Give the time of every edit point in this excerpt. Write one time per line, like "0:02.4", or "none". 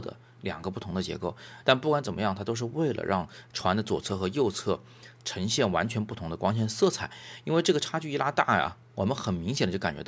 0:01.6